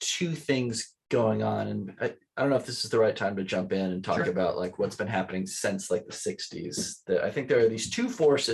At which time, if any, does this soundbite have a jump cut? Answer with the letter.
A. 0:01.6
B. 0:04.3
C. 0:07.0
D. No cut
D